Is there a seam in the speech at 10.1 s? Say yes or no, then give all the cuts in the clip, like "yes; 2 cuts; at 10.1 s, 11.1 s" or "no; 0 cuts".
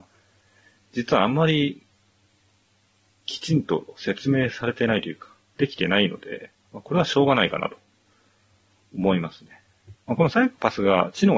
yes; 1 cut; at 10.1 s